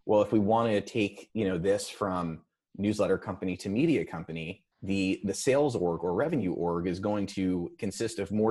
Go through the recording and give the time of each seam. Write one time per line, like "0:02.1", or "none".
0:04.7